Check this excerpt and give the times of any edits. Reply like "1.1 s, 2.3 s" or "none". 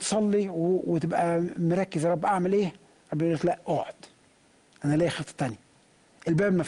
none